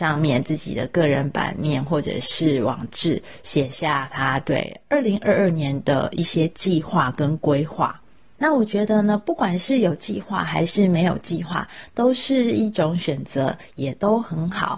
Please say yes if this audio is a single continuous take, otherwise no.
yes